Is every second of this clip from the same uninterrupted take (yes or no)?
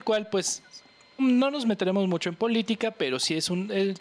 no